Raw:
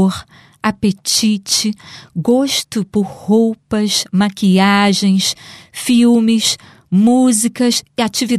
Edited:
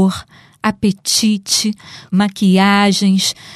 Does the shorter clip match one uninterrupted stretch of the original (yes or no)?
no